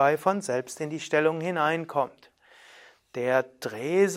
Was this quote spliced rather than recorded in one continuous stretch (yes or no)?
no